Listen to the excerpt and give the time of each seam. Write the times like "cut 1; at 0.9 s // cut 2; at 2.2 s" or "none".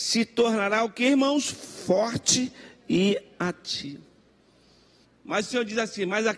cut 1; at 5.0 s